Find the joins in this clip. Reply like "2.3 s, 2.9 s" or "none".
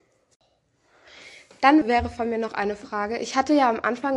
1.8 s